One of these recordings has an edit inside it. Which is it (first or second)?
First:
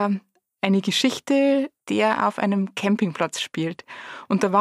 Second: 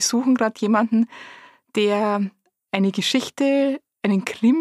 first